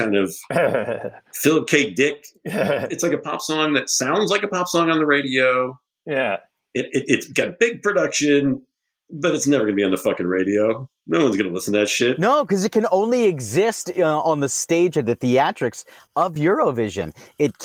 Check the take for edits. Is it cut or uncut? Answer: uncut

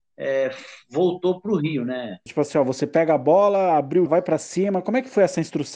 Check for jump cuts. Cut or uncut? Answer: cut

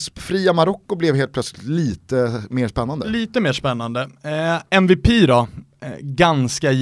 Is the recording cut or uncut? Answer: uncut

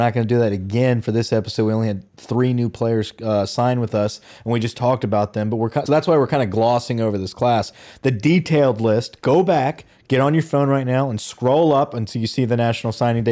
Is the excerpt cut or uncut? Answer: cut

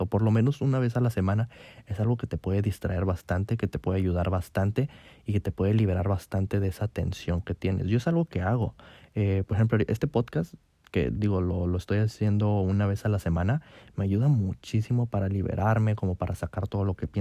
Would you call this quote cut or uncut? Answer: uncut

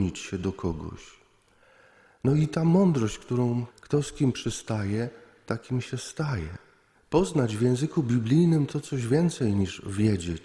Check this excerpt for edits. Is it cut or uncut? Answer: cut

